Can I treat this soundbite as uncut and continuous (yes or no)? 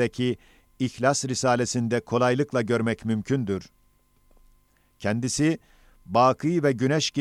yes